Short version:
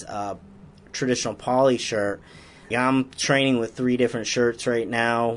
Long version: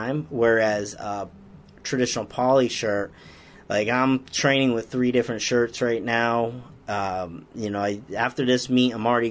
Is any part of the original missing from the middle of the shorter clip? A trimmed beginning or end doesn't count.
yes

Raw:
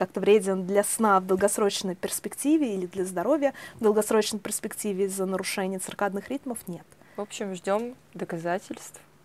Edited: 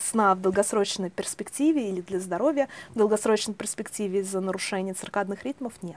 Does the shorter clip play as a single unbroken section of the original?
yes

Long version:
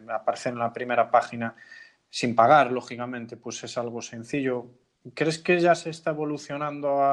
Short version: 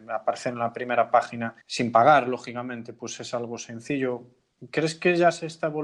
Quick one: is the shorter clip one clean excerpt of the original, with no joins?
no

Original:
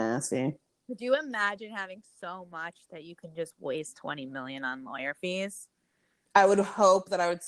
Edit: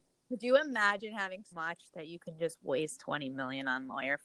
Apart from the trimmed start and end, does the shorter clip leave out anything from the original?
yes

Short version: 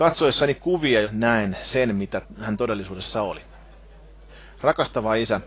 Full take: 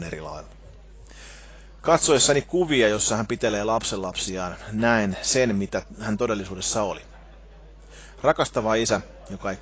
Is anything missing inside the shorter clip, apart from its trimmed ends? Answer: yes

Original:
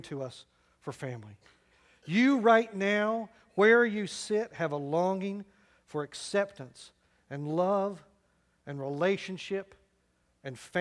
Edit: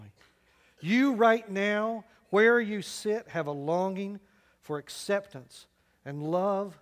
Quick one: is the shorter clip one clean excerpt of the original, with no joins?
yes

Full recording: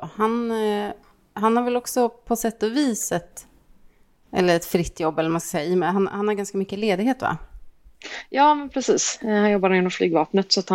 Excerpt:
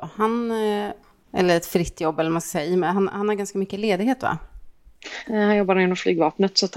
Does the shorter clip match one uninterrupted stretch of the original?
no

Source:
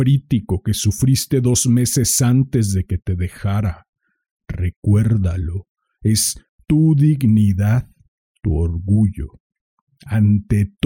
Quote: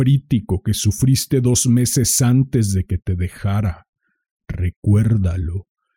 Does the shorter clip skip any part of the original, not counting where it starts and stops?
no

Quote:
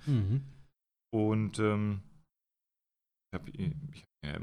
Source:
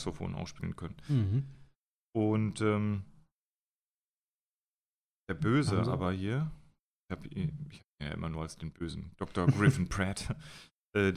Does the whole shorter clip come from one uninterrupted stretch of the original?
no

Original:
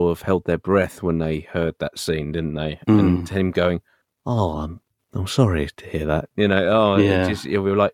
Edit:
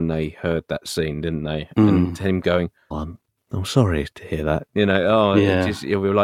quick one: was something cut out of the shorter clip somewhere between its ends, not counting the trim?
yes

